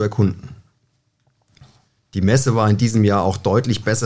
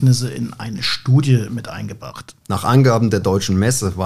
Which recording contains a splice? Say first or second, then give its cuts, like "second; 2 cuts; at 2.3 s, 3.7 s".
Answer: second; 1 cut; at 2.4 s